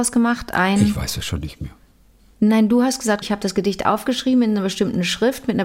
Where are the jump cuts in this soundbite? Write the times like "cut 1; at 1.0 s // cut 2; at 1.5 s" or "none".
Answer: cut 1; at 3.2 s

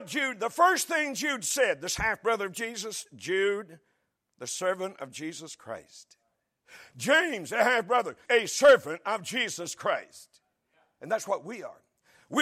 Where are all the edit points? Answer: cut 1; at 8.3 s

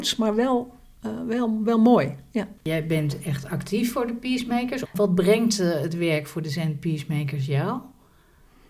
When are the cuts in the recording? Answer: cut 1; at 2.6 s // cut 2; at 4.9 s

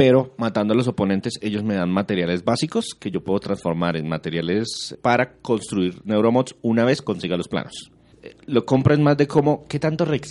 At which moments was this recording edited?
cut 1; at 4.9 s // cut 2; at 8.1 s

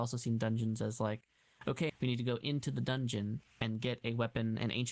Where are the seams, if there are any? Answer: cut 1; at 1.9 s

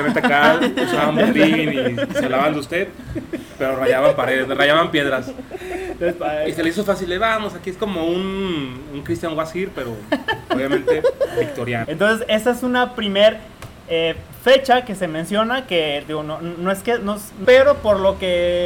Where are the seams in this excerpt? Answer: cut 1; at 11.8 s // cut 2; at 17.4 s

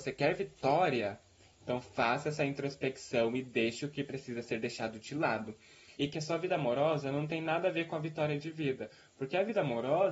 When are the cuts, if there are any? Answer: cut 1; at 6.0 s

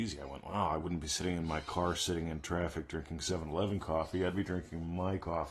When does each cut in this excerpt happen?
none

